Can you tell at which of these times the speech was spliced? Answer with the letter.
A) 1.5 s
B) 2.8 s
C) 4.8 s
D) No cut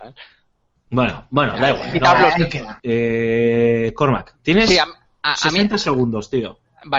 B